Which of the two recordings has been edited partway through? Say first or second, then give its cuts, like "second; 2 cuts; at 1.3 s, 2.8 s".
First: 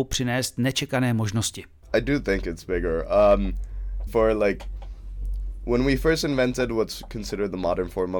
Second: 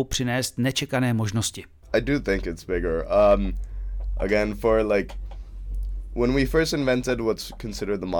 first; 1 cut; at 4.1 s